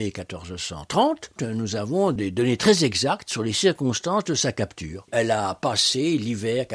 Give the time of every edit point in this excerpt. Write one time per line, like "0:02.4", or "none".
0:01.4
0:05.1